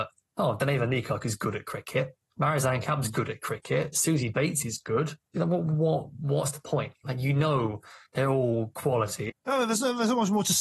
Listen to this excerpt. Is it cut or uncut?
cut